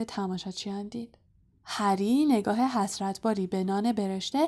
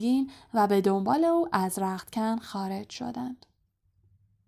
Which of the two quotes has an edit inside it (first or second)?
first